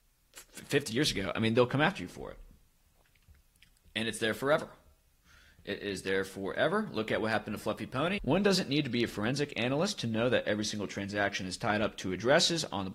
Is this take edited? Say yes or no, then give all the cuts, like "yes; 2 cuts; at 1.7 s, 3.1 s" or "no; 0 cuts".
yes; 1 cut; at 8.2 s